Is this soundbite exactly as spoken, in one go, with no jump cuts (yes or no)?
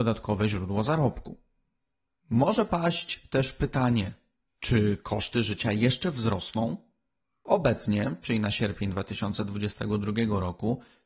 yes